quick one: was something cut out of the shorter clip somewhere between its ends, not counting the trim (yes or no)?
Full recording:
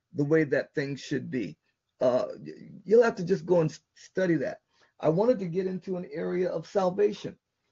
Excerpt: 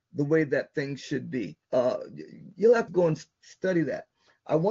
yes